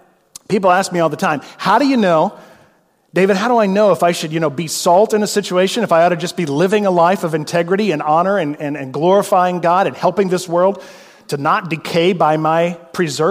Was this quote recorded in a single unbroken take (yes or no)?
yes